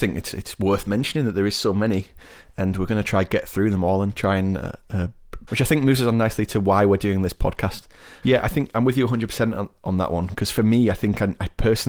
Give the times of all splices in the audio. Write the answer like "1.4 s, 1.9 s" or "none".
5.5 s, 8.2 s